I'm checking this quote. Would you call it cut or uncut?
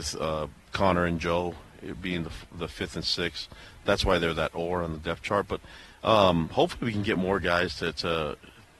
uncut